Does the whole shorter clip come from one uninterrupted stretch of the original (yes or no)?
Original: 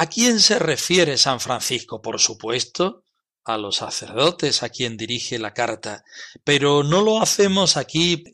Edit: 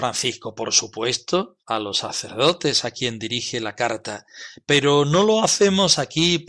no